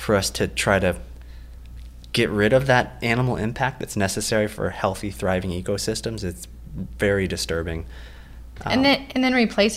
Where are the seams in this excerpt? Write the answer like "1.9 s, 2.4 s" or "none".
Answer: none